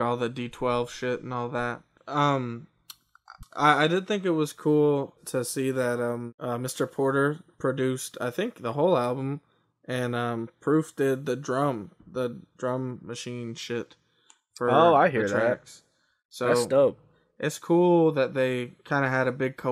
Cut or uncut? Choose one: cut